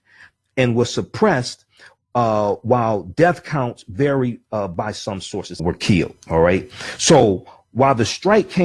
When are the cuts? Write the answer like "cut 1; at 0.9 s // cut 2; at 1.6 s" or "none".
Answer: cut 1; at 5.6 s